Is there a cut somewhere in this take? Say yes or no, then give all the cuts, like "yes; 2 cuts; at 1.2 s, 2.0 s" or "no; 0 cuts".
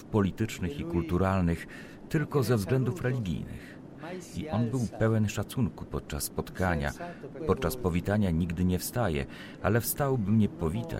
yes; 1 cut; at 7.4 s